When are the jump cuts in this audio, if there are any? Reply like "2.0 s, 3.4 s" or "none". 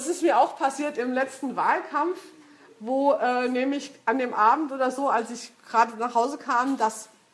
none